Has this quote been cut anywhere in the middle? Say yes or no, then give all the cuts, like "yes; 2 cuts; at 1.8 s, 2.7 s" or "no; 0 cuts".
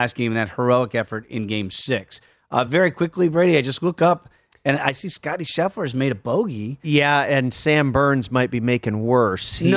no; 0 cuts